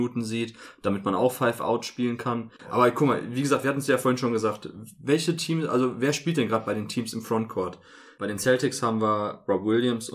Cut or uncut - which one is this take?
cut